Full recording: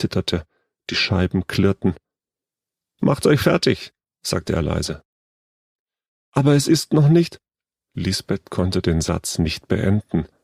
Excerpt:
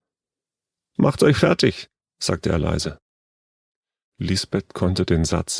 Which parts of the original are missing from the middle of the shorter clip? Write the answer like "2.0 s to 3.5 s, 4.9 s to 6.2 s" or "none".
6.1 s to 7.9 s

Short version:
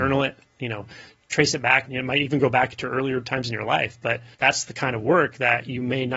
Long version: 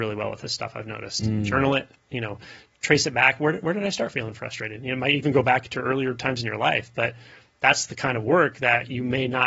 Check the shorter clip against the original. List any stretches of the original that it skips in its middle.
3.4 s to 4.8 s, 7.3 s to 7.5 s

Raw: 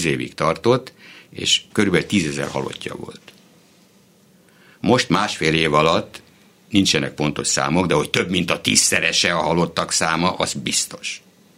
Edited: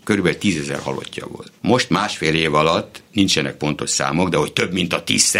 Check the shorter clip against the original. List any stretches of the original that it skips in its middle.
3.3 s to 4.8 s, 6.3 s to 6.6 s

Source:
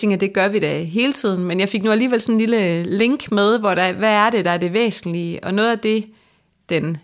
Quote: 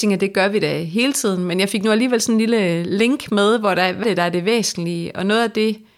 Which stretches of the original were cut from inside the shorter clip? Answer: 4.0 s to 4.3 s

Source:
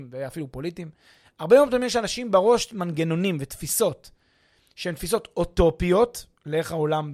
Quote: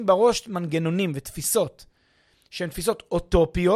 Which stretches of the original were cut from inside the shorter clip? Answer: none

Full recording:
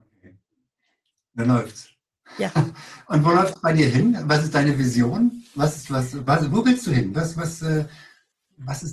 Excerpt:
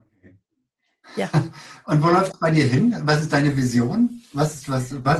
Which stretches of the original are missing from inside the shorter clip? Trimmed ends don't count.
1.0 s to 2.3 s

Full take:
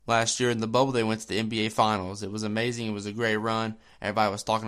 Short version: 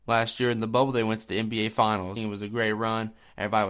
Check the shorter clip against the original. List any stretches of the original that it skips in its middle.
2.2 s to 2.8 s

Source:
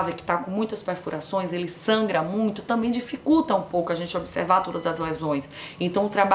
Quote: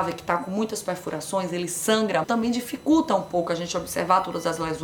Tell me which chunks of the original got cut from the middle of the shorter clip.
2.2 s to 2.6 s

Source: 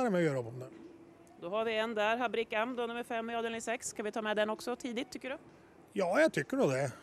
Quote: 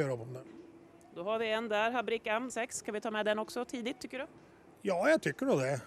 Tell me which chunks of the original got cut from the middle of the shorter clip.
2.8 s to 3.6 s

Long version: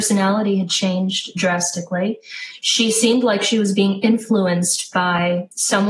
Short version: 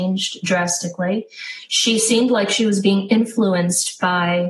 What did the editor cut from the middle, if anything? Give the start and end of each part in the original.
none

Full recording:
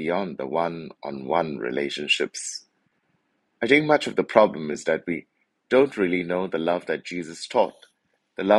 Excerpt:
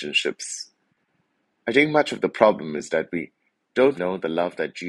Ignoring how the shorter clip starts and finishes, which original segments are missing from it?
5.9 s to 6.3 s

